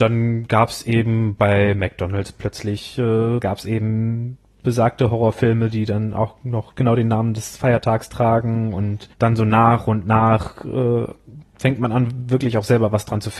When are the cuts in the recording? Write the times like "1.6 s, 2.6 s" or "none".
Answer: 3.4 s, 9.1 s, 11.5 s